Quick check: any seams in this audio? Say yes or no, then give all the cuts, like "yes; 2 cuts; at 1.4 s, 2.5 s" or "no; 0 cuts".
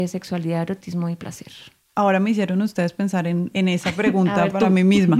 no; 0 cuts